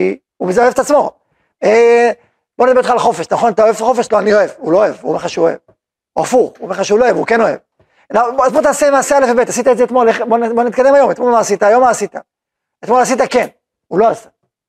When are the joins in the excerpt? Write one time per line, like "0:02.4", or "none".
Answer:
none